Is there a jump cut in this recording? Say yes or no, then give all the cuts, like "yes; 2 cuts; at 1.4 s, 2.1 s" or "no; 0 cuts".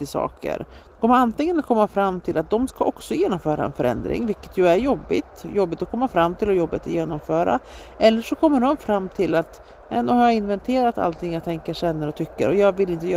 no; 0 cuts